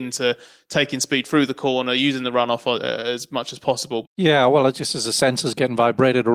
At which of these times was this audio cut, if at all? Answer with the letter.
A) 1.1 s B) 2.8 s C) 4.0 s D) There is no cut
C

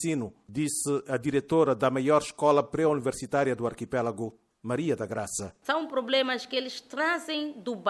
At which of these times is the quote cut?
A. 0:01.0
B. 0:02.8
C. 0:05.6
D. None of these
D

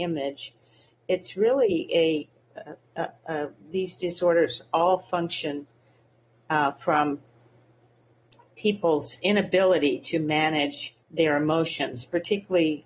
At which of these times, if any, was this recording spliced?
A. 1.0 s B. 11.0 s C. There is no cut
B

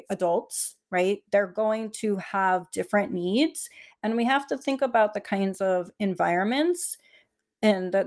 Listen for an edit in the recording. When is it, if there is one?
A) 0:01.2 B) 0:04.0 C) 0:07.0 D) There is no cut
D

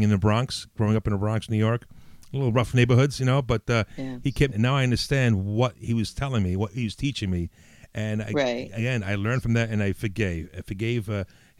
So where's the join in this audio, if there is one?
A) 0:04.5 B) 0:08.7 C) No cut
A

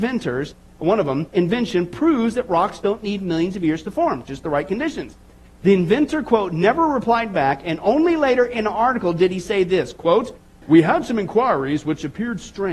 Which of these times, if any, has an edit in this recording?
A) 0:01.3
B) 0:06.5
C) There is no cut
A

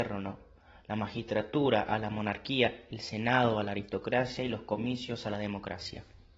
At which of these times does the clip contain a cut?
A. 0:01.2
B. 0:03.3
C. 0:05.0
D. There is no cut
D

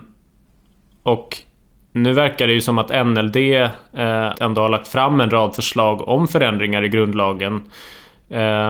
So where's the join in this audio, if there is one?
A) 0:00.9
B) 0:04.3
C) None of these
B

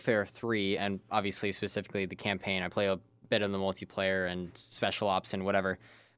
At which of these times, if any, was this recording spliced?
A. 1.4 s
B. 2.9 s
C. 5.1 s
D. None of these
D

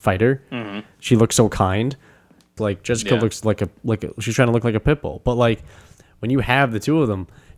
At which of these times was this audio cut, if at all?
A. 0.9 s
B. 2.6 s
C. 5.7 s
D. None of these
B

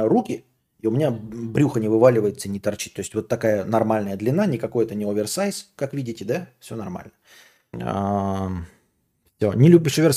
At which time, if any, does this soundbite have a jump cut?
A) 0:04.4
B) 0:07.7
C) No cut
B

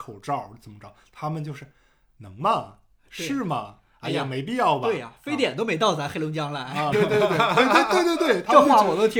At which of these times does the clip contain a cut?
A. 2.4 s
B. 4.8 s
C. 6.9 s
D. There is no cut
C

